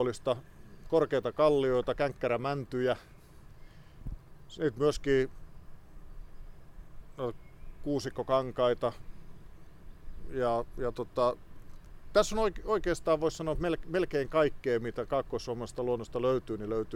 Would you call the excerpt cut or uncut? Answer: uncut